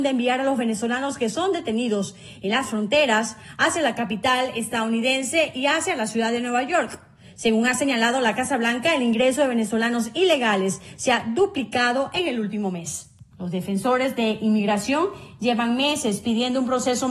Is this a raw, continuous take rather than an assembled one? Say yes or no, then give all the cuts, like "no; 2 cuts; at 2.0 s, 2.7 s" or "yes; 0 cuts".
no; 1 cut; at 13.3 s